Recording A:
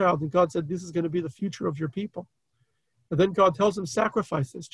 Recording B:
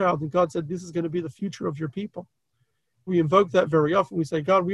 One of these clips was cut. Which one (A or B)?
B